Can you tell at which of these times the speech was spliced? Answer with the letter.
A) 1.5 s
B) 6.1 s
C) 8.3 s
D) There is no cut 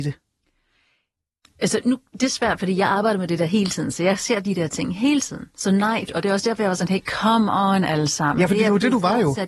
B